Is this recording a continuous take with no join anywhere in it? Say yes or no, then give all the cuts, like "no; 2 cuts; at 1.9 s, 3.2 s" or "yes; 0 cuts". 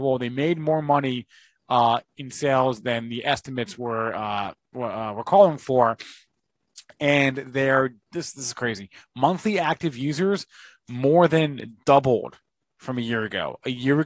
yes; 0 cuts